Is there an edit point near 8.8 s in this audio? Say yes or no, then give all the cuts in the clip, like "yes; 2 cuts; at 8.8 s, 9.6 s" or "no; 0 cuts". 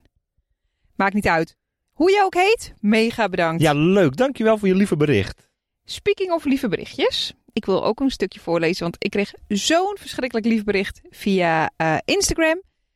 no; 0 cuts